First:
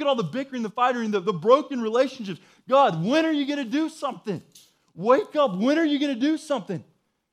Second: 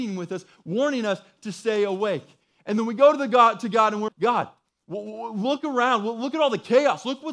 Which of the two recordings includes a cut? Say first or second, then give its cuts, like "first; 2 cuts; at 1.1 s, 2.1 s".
second; 1 cut; at 4.1 s